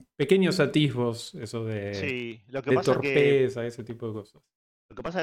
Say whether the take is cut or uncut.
uncut